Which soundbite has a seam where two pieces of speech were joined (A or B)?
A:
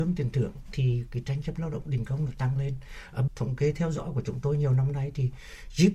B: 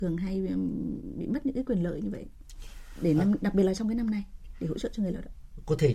A